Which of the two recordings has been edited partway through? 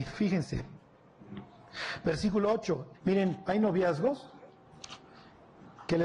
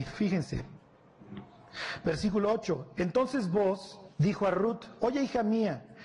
first; 1 cut; at 2.9 s

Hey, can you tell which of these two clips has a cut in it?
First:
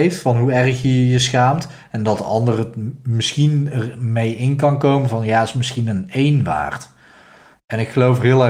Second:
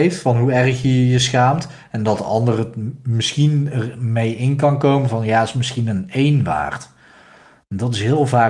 first; 1 cut; at 7.5 s

